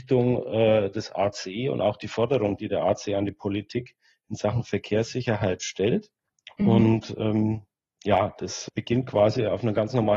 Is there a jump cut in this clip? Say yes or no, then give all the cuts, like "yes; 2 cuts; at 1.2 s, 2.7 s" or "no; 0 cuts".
no; 0 cuts